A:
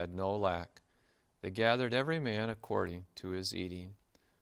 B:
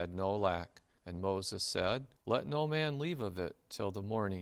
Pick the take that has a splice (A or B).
B